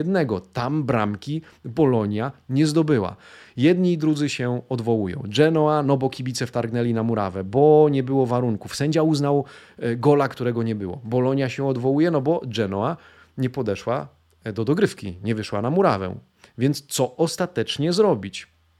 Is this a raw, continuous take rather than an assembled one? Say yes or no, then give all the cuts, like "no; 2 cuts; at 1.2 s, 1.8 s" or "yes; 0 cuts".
yes; 0 cuts